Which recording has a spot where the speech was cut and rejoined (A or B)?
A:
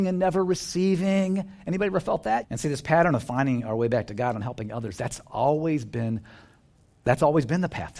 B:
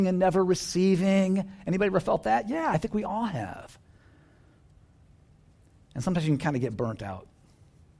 A